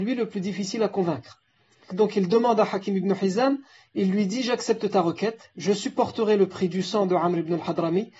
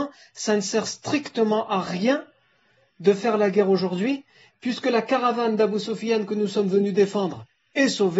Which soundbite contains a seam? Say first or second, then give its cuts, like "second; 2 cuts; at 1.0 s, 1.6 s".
first; 1 cut; at 1.9 s